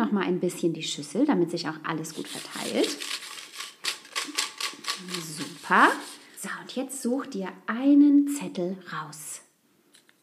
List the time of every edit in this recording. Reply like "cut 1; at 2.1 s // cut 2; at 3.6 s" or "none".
cut 1; at 6.4 s